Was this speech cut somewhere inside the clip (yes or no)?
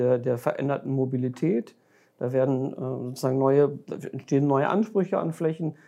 no